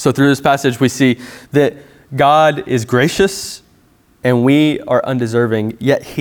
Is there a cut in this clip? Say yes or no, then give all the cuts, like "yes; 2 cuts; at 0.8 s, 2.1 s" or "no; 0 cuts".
no; 0 cuts